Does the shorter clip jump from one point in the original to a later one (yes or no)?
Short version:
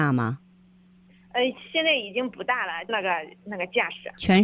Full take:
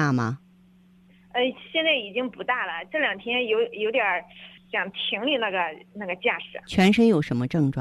yes